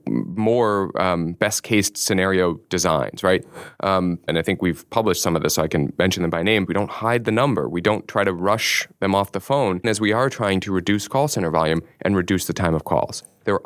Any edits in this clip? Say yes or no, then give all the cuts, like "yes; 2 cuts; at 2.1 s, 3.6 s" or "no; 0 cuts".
yes; 3 cuts; at 4.3 s, 6.7 s, 9.8 s